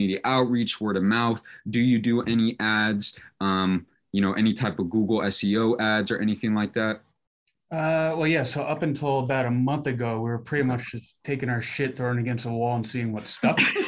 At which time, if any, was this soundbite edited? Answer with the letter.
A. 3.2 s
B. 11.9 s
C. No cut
C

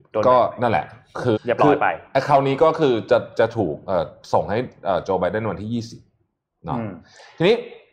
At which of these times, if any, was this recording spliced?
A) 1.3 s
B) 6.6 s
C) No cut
A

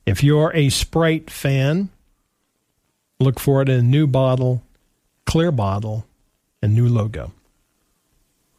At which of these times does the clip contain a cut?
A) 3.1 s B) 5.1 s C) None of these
C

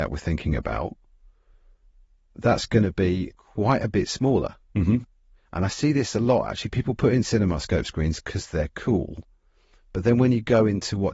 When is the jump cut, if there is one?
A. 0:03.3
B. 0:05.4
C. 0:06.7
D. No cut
A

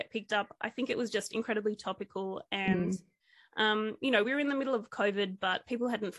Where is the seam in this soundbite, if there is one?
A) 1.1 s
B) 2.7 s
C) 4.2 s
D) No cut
D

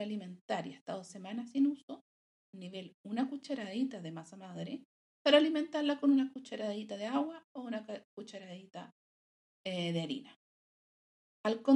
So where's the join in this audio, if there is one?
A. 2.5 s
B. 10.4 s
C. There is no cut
A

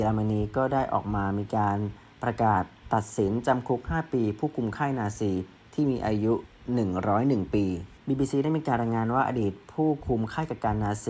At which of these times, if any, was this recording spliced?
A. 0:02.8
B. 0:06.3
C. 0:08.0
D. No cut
C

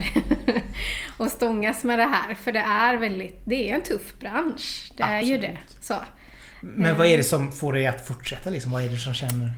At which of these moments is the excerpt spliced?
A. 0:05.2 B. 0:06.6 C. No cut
C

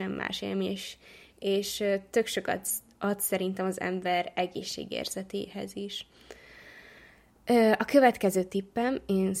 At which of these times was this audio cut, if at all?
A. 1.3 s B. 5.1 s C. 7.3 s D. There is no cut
D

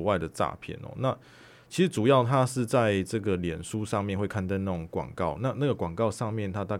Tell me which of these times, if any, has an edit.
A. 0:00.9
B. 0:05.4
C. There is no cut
C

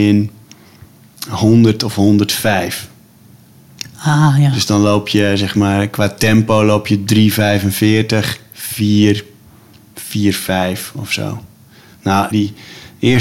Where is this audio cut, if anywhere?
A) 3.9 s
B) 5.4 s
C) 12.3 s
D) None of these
C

